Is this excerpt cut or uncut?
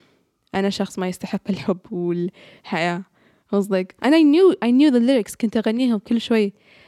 cut